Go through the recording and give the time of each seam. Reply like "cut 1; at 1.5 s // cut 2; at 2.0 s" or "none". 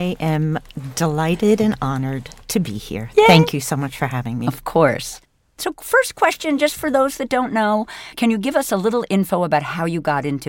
none